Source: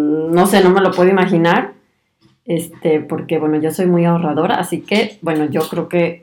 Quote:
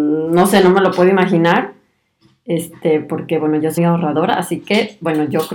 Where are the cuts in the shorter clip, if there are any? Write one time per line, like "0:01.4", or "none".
0:03.8